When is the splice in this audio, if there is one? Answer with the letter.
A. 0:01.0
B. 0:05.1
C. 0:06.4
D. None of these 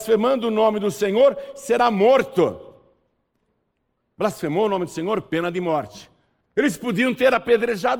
C